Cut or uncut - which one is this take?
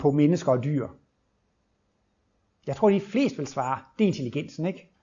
uncut